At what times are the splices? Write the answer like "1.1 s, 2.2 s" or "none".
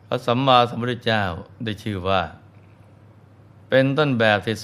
1.6 s